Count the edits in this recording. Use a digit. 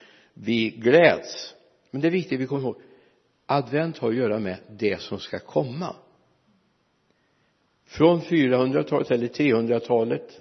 0